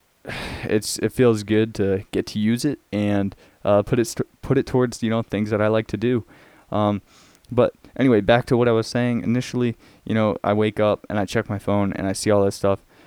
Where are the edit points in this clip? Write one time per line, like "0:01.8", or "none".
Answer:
none